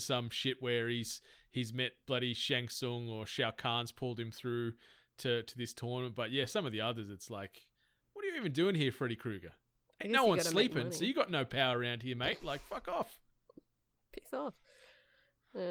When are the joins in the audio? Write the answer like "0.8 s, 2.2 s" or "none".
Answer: none

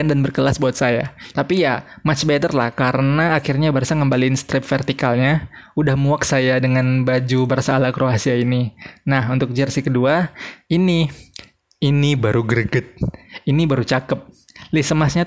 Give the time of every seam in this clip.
1.3 s

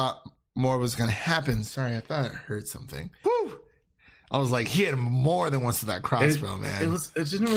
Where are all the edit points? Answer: 3.2 s

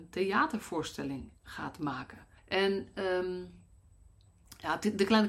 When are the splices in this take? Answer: 2.4 s

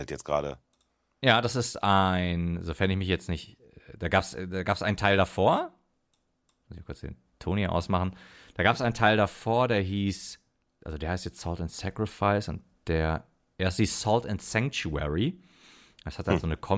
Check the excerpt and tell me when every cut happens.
none

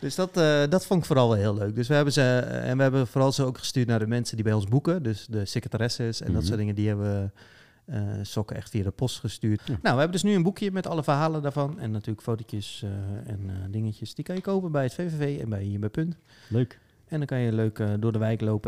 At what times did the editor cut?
9.6 s

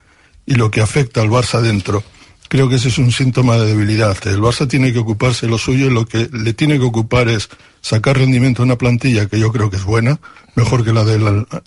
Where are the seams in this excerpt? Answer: 4.2 s

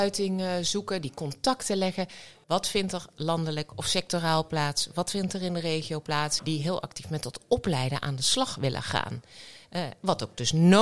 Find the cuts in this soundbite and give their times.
2.4 s, 6.4 s

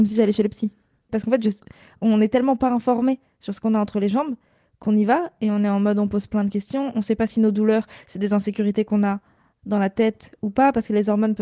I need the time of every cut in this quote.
1.1 s

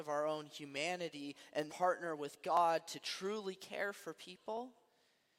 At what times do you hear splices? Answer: 1.7 s

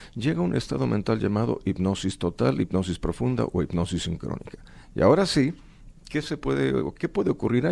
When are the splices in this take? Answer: none

